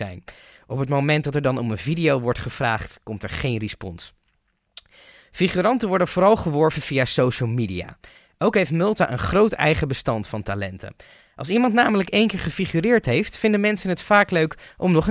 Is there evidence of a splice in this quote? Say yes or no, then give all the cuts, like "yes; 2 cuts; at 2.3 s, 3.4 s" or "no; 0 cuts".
no; 0 cuts